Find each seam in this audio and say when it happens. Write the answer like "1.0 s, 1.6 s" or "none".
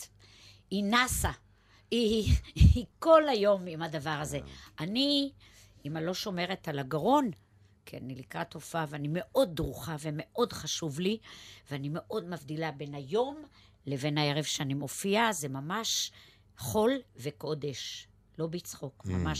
none